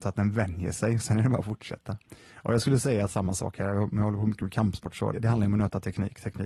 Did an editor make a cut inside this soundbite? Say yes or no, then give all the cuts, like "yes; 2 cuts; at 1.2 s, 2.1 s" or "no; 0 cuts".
yes; 1 cut; at 5.1 s